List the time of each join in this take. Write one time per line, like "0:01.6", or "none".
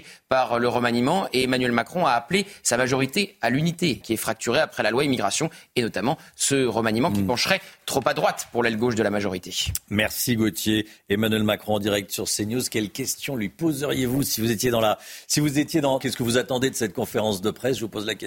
0:04.0
0:16.0